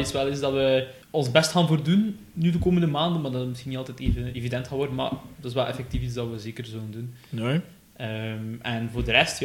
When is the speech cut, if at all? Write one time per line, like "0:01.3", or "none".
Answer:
0:01.0